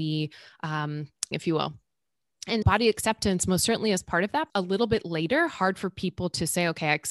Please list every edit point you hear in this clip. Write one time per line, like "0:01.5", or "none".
0:01.3
0:02.6
0:04.5